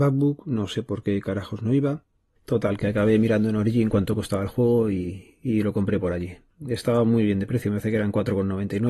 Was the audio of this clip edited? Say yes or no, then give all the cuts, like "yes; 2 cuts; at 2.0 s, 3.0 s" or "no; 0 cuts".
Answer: no; 0 cuts